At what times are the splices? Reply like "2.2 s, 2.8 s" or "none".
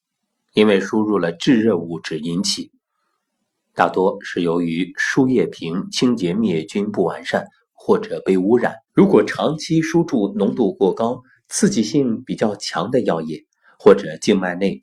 8.9 s